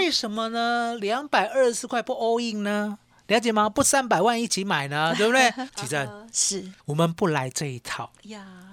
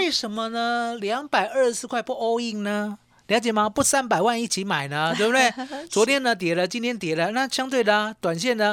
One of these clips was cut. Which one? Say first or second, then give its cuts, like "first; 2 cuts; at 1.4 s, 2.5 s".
first; 2 cuts; at 5.7 s, 6.8 s